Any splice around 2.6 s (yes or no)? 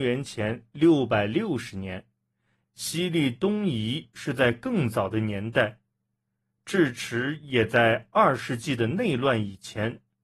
yes